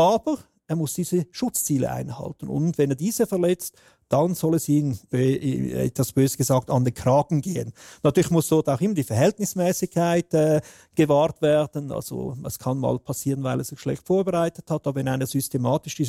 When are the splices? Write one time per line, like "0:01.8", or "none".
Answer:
0:05.1